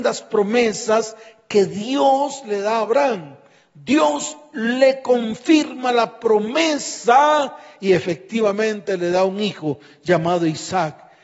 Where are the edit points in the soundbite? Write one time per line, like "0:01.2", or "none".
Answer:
none